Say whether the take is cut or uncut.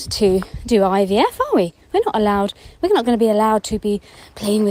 uncut